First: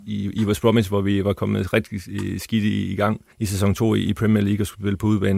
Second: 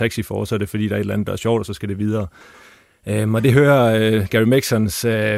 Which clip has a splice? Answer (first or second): first